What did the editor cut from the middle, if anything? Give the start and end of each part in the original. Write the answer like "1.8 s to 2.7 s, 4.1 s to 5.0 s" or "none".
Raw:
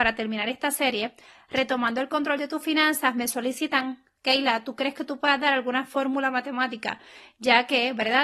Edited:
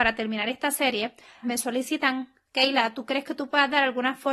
1.4 s to 3.1 s